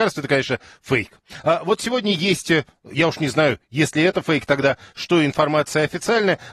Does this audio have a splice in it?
no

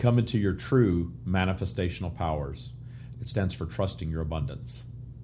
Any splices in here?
yes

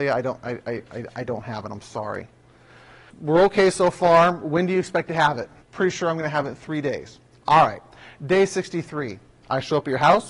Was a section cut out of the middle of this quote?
yes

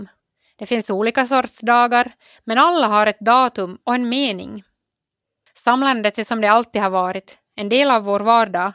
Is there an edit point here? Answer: yes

